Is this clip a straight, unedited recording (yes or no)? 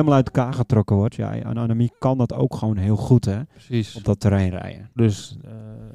no